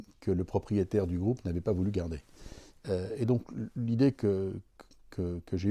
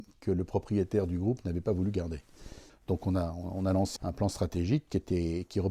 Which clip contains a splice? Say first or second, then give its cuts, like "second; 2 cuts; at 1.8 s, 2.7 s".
second; 2 cuts; at 2.7 s, 4.0 s